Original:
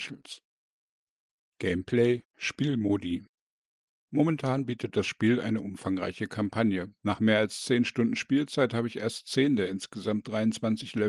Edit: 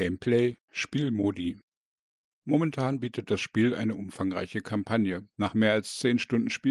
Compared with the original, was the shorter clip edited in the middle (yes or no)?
no